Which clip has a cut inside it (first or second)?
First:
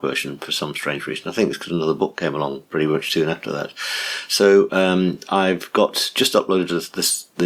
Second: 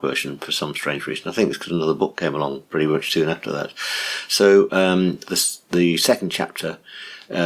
second